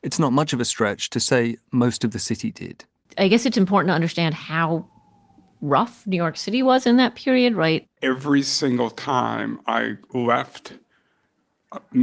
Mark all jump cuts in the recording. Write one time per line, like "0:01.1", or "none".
0:03.0
0:07.8